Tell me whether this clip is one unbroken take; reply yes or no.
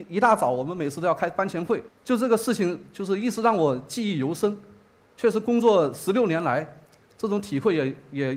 no